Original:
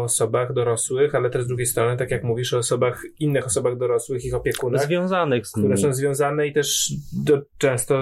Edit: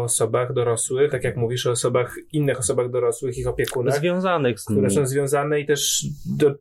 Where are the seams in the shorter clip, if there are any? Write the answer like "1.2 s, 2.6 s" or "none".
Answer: 1.1 s